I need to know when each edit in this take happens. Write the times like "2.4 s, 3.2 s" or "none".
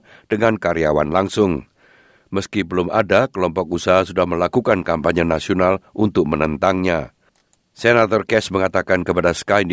none